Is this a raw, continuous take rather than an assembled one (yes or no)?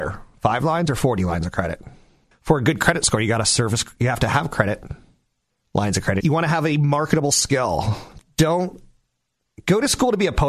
no